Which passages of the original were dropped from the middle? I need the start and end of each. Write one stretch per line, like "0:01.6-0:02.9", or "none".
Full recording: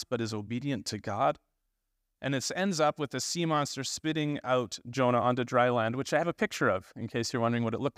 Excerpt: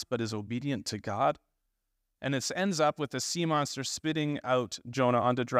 none